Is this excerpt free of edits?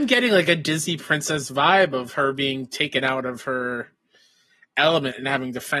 yes; 0 cuts

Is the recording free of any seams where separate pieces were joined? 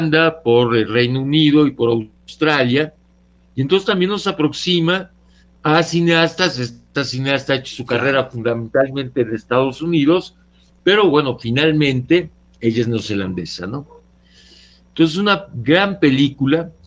yes; 0 cuts

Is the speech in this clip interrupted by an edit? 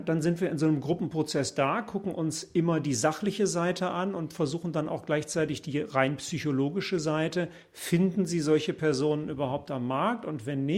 no; 0 cuts

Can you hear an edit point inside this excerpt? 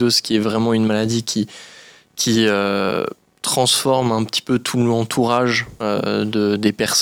no; 0 cuts

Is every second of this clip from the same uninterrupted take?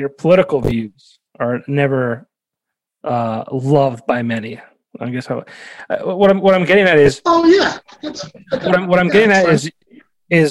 yes; 0 cuts

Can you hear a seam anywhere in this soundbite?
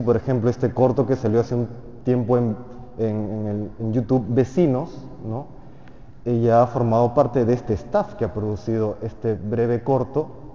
no; 0 cuts

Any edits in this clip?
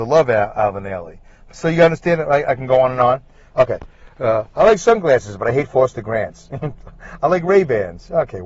no; 0 cuts

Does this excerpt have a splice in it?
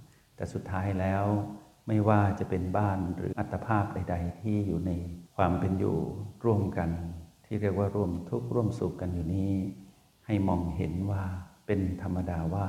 yes; 1 cut; at 3.3 s

